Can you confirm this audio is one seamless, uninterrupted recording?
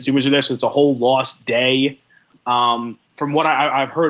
yes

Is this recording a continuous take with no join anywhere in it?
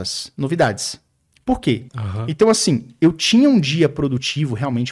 no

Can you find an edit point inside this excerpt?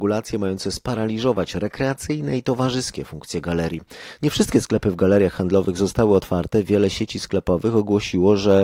yes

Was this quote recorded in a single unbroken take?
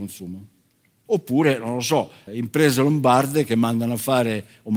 no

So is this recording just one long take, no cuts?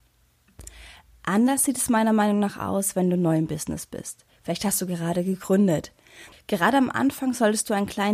no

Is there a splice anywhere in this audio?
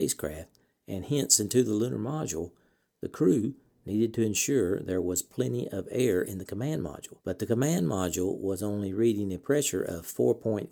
yes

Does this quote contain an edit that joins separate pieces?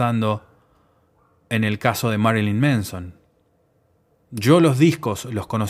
no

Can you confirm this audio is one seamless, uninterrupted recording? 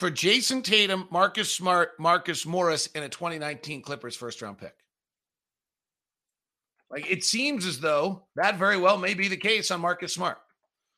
no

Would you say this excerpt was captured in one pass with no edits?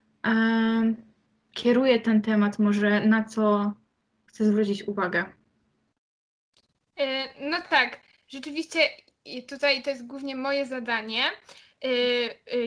yes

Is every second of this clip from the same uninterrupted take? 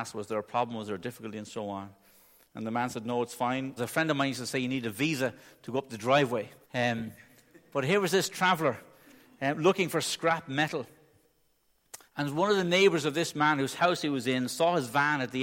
no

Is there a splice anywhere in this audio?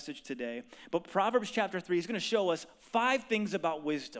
no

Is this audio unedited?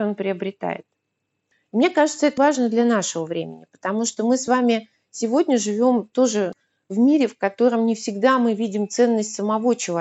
no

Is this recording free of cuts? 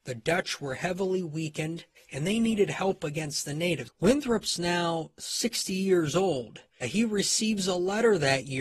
no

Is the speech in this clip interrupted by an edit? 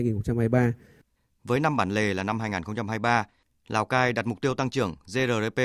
no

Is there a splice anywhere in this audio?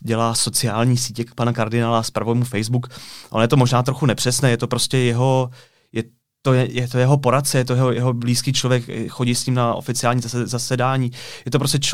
no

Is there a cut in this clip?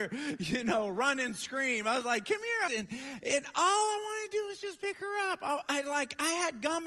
yes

